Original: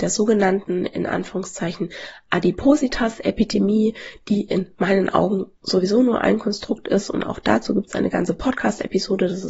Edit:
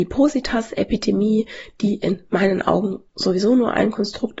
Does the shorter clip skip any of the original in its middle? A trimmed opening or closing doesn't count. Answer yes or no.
no